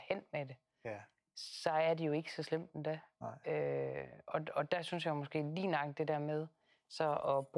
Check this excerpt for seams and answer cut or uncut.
uncut